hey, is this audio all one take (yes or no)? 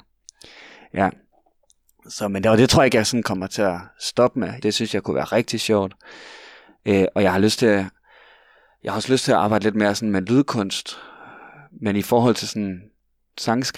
no